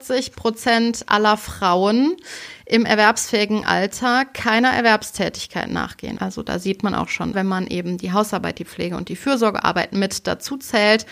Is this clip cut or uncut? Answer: cut